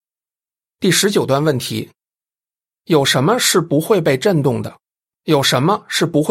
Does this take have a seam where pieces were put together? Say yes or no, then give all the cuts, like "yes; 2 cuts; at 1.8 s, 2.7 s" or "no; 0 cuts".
yes; 1 cut; at 5.1 s